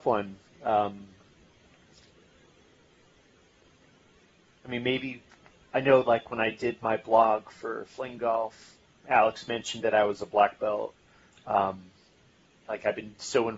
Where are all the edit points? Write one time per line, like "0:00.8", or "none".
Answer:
0:12.6